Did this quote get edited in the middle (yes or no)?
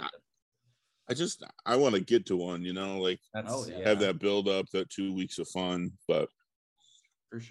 no